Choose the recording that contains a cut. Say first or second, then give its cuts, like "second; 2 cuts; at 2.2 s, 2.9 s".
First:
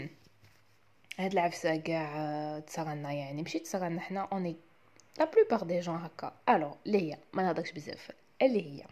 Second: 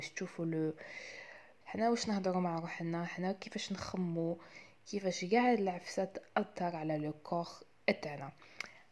second; 1 cut; at 1.6 s